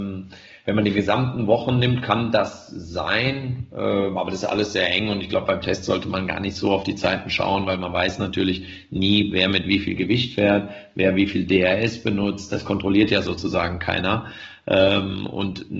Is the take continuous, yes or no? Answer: yes